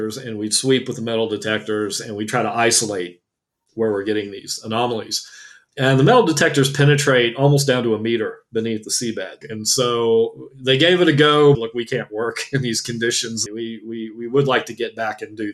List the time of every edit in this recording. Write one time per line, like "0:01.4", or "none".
0:09.4
0:11.5
0:13.5